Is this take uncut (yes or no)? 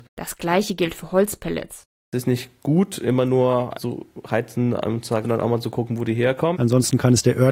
no